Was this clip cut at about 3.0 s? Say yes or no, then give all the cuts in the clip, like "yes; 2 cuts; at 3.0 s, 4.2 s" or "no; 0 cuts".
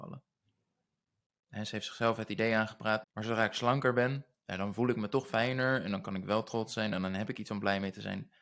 yes; 1 cut; at 3.0 s